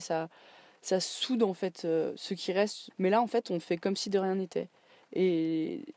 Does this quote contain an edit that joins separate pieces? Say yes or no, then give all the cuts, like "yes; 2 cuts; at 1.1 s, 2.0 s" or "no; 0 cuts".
yes; 1 cut; at 2.9 s